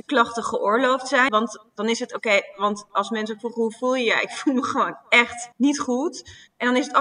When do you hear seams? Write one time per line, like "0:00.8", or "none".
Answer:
0:01.3
0:05.5